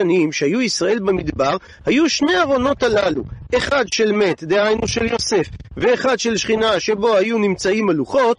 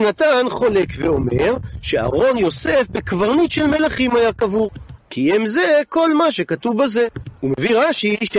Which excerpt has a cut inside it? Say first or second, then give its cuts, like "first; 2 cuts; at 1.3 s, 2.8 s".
second; 1 cut; at 5.0 s